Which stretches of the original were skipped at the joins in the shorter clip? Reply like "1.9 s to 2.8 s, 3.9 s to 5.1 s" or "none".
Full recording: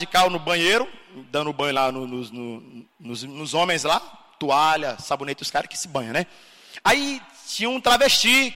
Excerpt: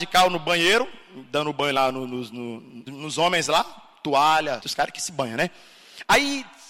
2.9 s to 3.2 s, 5.0 s to 5.4 s